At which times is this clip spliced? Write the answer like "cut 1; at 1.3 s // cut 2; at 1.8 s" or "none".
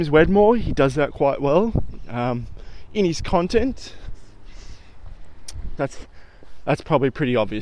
cut 1; at 5.8 s